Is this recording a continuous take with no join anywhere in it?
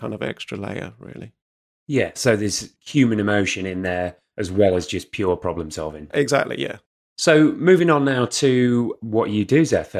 yes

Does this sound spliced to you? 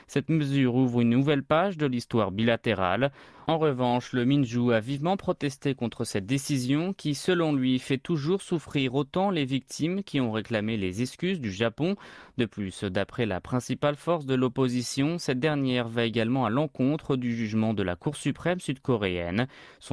yes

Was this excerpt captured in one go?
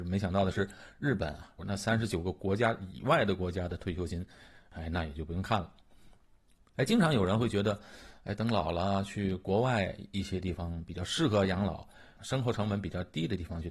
no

